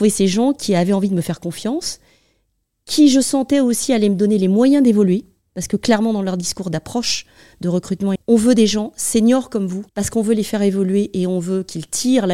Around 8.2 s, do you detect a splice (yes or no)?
yes